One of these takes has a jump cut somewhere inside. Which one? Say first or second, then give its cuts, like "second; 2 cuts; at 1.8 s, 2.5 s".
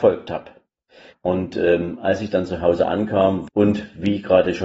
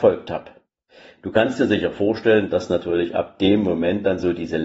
first; 2 cuts; at 1.1 s, 3.5 s